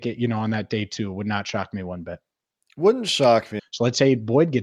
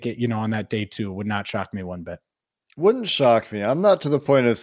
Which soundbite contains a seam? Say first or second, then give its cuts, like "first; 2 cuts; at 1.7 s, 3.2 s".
first; 1 cut; at 3.6 s